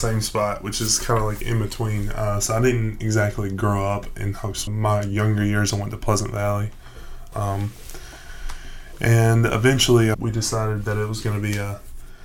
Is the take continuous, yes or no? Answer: no